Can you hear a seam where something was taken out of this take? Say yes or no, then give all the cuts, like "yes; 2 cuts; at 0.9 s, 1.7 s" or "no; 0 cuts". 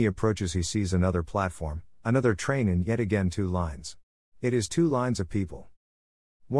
yes; 1 cut; at 4.3 s